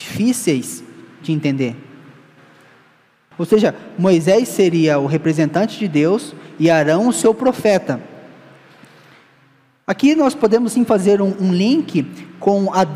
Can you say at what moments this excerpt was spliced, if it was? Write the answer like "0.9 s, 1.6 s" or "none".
3.3 s